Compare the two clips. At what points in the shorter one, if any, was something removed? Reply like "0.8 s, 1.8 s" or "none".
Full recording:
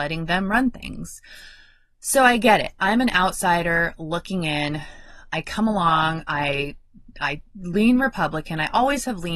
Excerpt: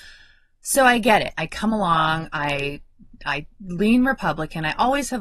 1.3 s